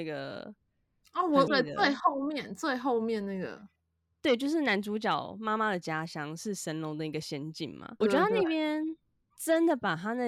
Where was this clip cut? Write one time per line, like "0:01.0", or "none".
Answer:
0:01.5
0:08.0